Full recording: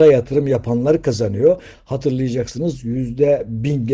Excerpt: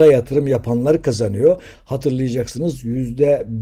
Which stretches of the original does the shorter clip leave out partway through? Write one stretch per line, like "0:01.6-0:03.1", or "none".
none